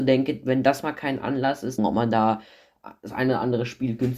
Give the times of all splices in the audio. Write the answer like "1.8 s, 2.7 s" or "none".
1.8 s